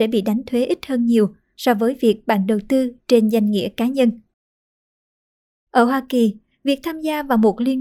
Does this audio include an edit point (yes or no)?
no